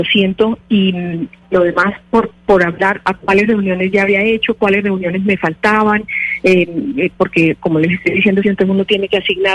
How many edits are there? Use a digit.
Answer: 2